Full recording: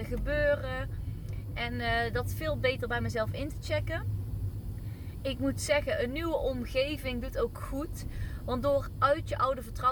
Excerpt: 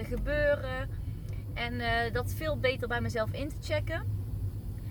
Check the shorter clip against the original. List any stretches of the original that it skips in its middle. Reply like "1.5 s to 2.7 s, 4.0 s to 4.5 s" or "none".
none